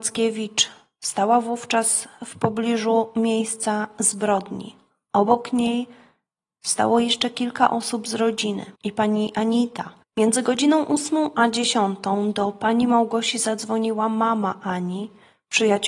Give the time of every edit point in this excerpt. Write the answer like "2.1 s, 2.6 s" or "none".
8.8 s, 10.0 s